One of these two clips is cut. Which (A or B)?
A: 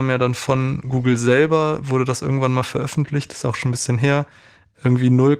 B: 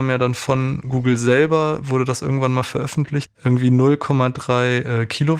B